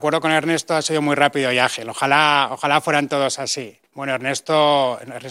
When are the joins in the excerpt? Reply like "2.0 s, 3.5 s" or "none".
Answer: 3.8 s